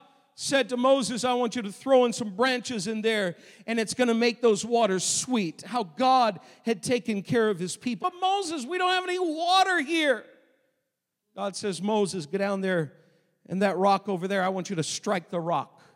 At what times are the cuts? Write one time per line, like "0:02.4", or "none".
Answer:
0:08.0